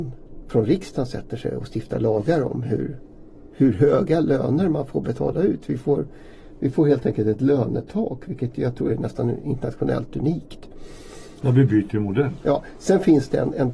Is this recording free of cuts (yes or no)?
no